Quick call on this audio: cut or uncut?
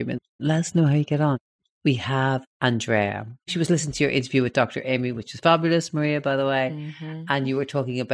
uncut